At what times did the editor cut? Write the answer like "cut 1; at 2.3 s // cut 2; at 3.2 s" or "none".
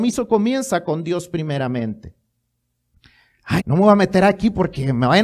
cut 1; at 3.6 s